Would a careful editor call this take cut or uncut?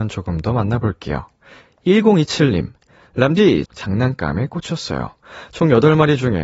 cut